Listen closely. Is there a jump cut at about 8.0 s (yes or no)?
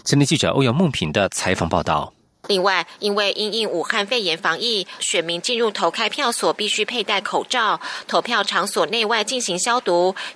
no